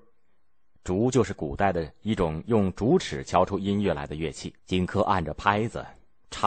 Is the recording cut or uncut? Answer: cut